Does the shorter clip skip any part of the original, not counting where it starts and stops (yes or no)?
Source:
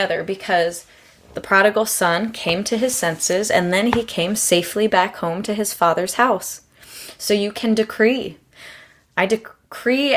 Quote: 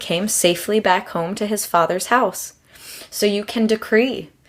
no